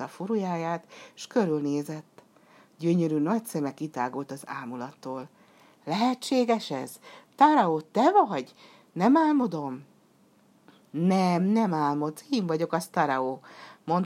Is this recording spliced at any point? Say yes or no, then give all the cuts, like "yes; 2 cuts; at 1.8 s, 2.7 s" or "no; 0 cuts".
no; 0 cuts